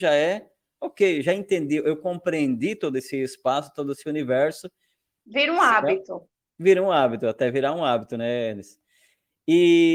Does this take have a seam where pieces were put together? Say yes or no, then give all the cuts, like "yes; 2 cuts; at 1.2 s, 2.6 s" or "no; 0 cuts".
yes; 1 cut; at 5.2 s